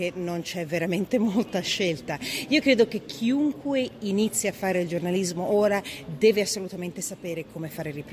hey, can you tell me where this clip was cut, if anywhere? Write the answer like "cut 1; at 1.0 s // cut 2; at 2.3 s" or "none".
none